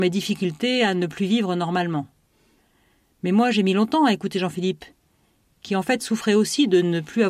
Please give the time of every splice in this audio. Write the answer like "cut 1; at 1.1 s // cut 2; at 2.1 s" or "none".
none